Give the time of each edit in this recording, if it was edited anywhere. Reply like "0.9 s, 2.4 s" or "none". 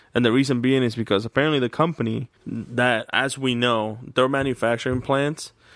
2.4 s